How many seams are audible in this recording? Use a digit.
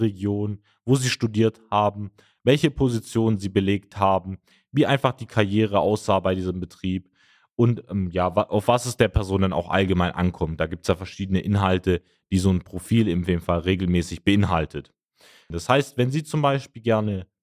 1